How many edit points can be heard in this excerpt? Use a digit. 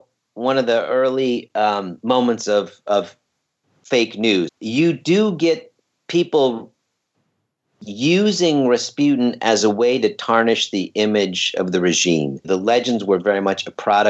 2